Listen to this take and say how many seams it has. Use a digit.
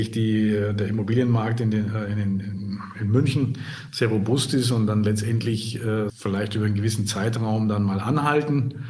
1